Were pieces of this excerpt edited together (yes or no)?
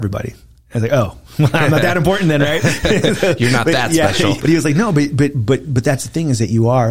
yes